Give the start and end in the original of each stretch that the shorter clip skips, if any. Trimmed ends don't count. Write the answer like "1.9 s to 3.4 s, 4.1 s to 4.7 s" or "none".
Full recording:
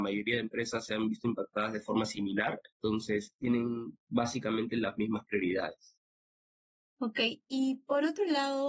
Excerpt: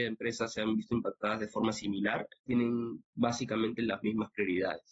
2.7 s to 3.4 s